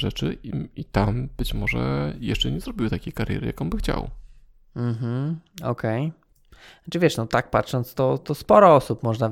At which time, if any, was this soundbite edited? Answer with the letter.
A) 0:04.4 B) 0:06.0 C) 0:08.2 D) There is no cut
D